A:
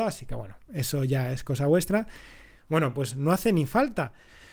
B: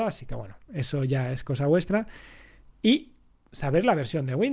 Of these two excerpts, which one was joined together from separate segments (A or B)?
A